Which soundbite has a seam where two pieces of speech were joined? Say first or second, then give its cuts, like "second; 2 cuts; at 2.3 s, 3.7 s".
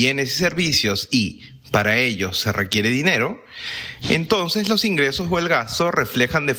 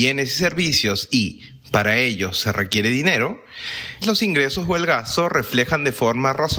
second; 1 cut; at 4.0 s